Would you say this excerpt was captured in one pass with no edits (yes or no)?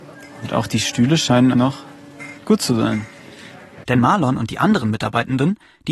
no